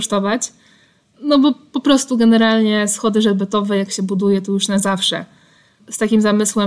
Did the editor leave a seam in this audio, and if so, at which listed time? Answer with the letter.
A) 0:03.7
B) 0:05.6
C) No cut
C